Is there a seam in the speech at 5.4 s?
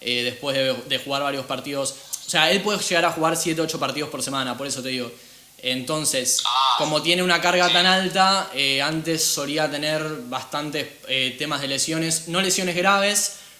no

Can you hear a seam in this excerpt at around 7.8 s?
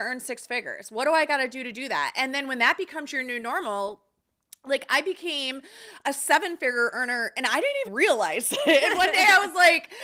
yes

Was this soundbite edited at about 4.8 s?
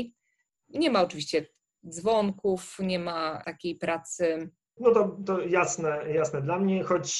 yes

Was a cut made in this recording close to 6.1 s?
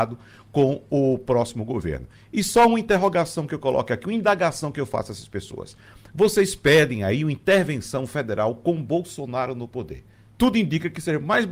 no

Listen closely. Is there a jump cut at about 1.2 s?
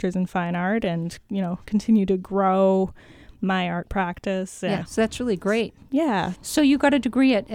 no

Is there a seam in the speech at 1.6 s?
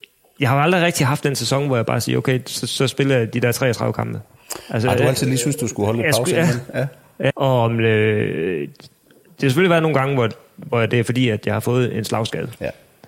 no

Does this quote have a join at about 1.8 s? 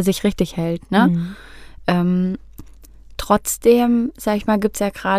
no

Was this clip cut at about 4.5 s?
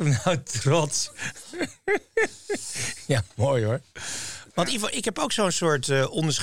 yes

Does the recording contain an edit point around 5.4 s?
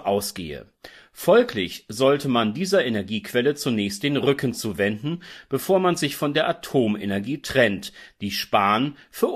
no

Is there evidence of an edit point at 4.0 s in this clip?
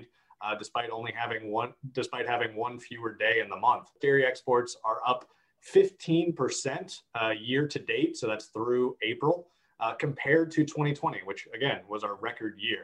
yes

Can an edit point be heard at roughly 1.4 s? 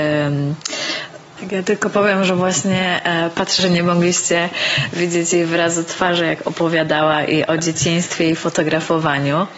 yes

